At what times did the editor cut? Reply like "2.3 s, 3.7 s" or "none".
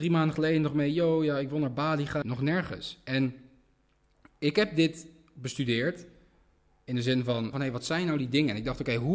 2.2 s, 7.5 s